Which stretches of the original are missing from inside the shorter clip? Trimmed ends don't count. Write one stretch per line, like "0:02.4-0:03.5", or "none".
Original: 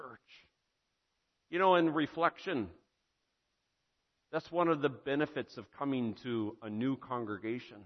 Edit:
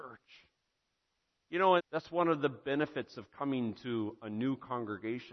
0:01.8-0:04.2

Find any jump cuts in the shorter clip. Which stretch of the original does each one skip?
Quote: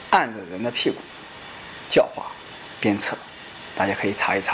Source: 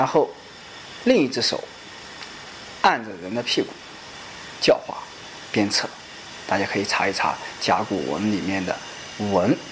none

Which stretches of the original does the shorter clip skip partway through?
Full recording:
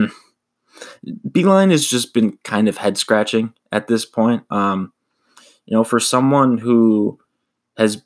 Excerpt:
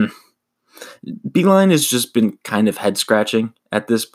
none

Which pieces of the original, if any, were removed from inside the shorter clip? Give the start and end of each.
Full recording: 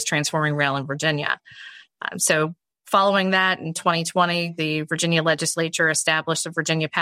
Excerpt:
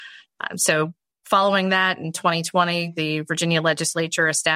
none

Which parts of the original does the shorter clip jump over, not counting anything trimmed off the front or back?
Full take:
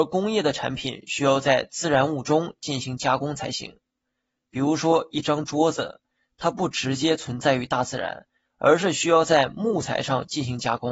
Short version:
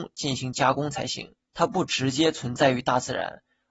0:03.9-0:06.3

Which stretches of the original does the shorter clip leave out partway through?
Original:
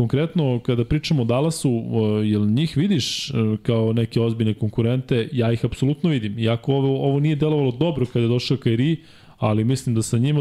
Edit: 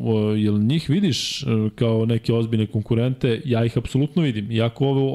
none

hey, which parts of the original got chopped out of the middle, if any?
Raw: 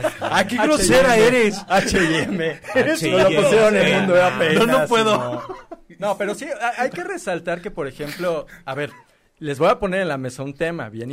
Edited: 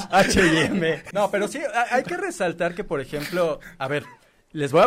0:02.7-0:06.0

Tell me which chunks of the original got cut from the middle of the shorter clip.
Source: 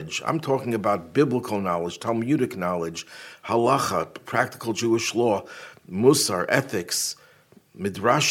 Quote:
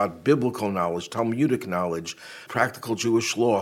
0:03.4-0:04.2

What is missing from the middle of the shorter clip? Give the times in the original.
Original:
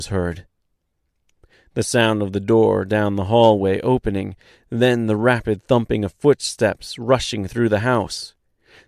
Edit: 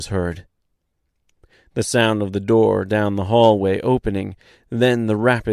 none

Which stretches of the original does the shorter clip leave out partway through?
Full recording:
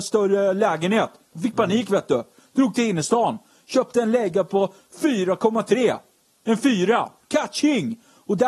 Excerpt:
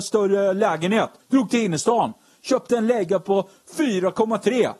0:01.2-0:02.4

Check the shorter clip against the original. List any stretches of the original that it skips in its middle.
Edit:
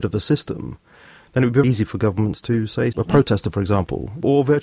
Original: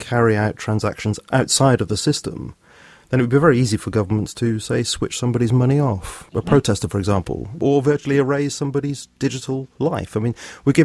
0:03.4-0:03.6
0:04.8-0:06.3

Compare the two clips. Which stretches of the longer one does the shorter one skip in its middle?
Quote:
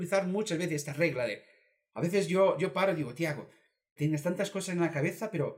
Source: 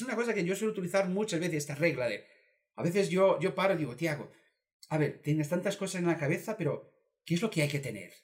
0:04.8-0:05.2

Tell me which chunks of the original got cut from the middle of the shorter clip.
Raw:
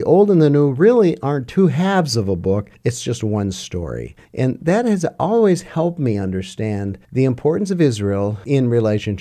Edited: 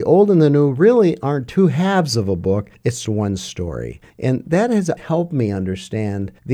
0:03.0-0:03.2
0:05.1-0:05.6

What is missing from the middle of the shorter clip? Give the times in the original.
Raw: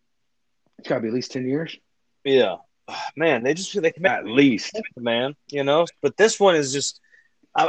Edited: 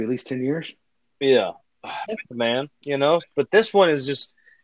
0:03.1-0:04.7

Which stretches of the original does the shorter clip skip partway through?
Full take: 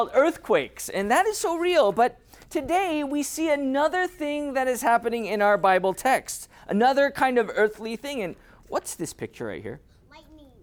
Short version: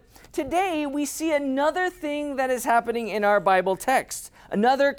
none

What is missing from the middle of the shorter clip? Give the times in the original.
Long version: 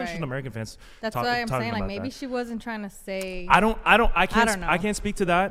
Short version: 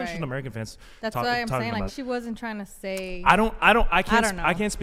0:01.9-0:02.1

